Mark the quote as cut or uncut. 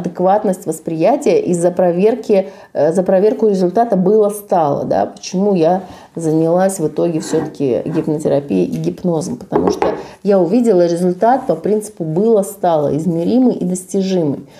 uncut